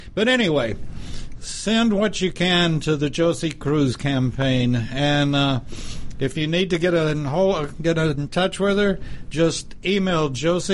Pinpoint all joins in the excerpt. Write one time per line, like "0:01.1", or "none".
none